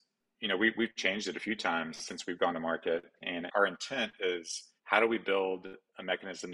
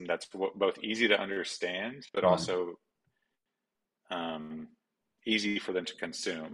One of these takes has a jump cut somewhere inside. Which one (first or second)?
first